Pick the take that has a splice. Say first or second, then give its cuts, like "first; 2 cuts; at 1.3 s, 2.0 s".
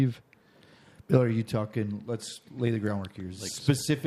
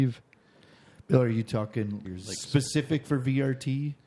second; 1 cut; at 2.0 s